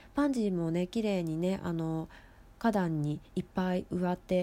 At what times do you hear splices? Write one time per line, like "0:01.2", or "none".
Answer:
none

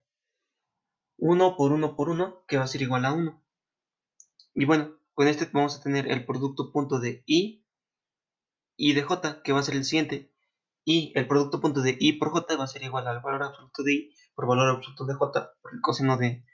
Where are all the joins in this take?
none

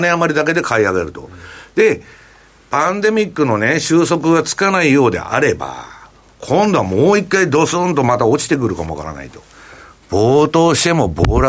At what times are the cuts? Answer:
none

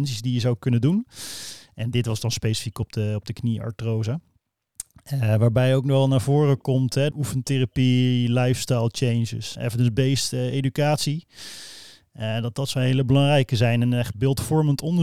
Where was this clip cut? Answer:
0:07.1
0:09.6

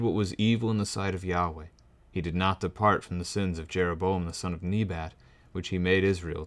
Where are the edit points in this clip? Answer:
none

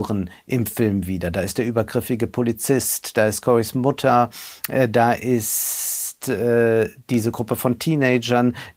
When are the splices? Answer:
none

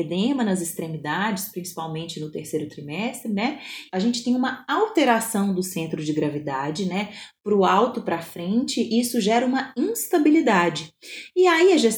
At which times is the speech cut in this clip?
0:03.9

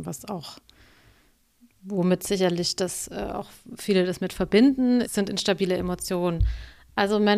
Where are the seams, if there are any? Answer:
0:05.0

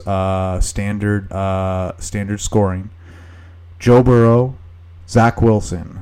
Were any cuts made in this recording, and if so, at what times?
0:01.3

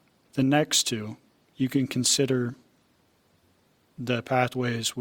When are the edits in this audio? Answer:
0:01.5

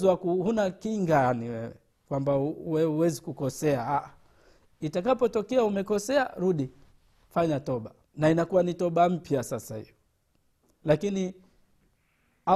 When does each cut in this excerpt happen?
0:08.0

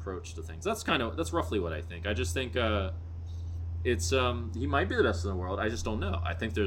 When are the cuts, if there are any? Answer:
none

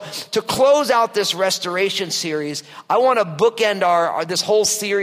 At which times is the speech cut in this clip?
none

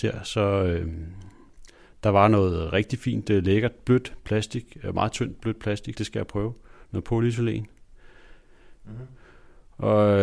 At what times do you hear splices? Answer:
0:05.9
0:08.8

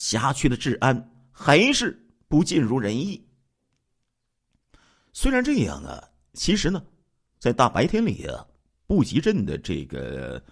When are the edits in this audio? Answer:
none

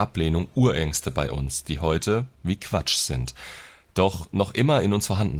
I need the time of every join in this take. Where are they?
0:02.3

